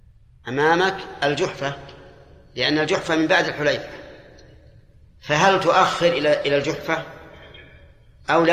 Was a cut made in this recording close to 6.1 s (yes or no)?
no